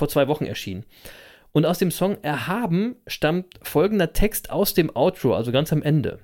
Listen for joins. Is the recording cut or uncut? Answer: uncut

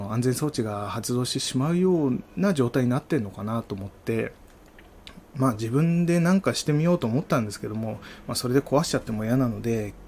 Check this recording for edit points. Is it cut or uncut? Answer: uncut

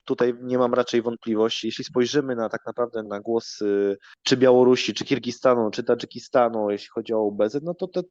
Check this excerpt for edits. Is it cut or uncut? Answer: cut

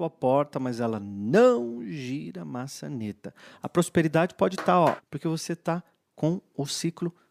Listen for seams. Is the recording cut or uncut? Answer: cut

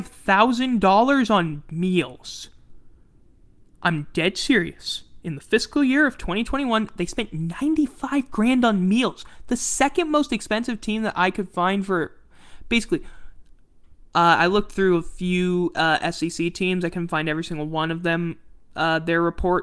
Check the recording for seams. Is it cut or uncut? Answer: uncut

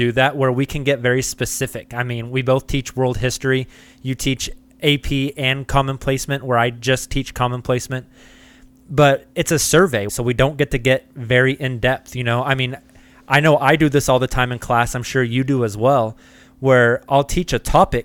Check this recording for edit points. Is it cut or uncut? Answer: cut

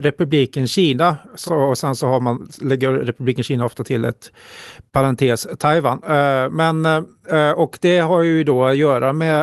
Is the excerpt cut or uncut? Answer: uncut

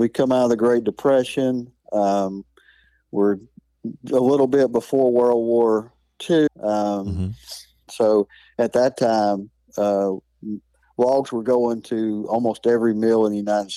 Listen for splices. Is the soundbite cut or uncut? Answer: cut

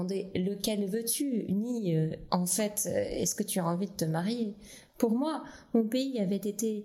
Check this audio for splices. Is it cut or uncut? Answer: cut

